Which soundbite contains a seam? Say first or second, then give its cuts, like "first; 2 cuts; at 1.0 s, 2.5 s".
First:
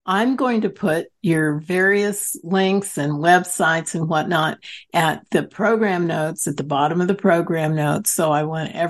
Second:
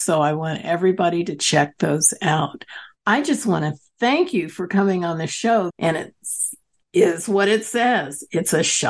second; 1 cut; at 5.7 s